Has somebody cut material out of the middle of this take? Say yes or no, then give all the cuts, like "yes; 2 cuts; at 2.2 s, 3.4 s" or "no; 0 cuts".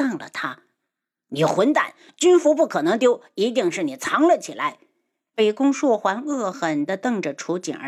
yes; 1 cut; at 6.5 s